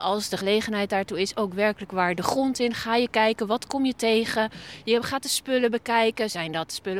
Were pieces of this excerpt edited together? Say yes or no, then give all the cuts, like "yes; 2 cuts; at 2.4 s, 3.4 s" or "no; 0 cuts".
no; 0 cuts